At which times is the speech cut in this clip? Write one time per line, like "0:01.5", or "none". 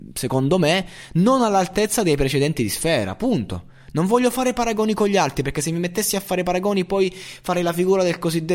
none